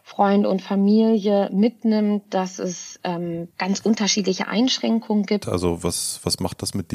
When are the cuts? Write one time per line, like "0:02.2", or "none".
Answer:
0:03.5
0:05.4